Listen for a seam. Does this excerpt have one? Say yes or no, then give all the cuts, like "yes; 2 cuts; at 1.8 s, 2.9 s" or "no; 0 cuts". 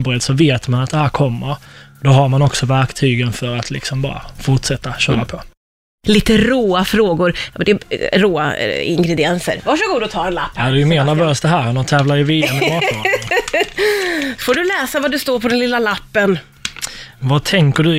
no; 0 cuts